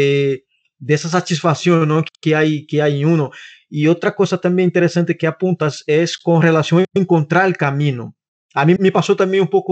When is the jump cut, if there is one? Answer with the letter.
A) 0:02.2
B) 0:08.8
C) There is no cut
B